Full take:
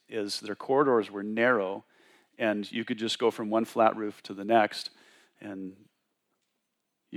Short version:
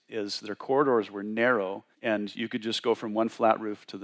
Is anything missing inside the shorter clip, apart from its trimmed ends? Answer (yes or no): yes